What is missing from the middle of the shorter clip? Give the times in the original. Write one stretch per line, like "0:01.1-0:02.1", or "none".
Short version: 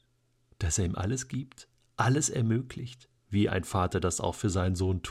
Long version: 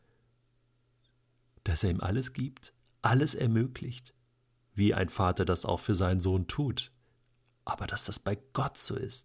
0:04.2-0:04.6